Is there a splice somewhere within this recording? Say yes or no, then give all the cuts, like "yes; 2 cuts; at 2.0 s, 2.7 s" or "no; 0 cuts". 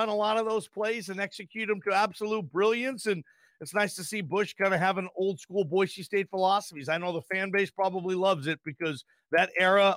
no; 0 cuts